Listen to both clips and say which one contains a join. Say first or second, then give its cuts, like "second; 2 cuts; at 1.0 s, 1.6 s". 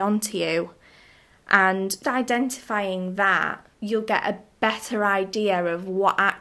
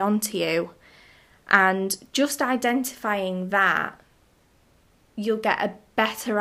first; 2 cuts; at 2.0 s, 3.7 s